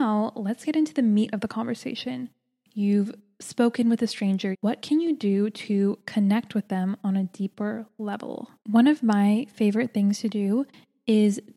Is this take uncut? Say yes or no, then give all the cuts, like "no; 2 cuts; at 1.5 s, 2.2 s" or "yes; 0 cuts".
no; 2 cuts; at 4.5 s, 8.6 s